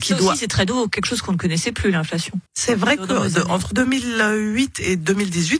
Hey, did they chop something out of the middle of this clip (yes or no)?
yes